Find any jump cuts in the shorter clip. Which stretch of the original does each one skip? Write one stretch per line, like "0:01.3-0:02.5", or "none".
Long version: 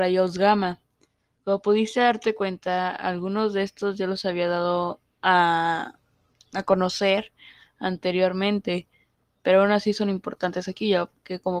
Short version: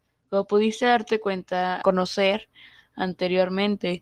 0:03.0-0:06.7